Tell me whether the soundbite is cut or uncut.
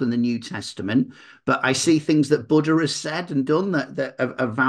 uncut